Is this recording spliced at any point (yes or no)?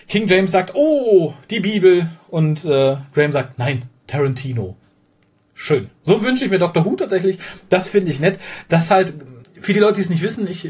no